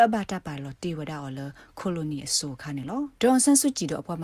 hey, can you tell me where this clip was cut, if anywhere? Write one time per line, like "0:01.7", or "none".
0:03.2